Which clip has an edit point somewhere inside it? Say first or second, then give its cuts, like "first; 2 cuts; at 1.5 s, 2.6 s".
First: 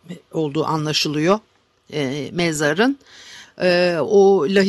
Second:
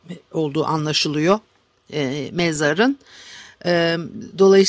first; 1 cut; at 3.4 s